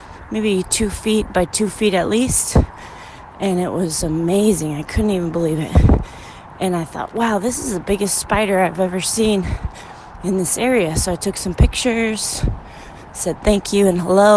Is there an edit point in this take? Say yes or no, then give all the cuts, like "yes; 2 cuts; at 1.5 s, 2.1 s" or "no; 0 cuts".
no; 0 cuts